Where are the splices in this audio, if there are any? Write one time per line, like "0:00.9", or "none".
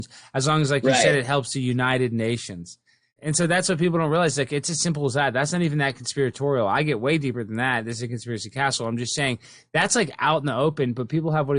0:03.2